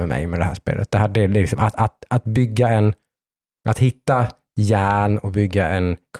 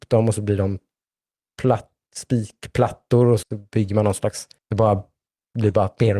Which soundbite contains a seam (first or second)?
second